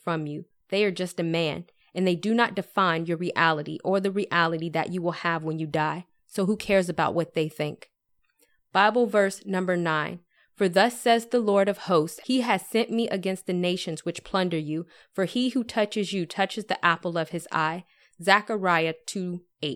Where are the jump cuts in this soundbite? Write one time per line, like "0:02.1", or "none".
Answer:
0:12.2